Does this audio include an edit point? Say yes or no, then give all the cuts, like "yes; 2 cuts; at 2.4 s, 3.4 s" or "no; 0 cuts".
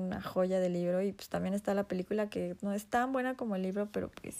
no; 0 cuts